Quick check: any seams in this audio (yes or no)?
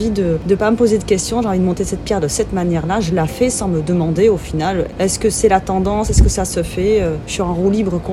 no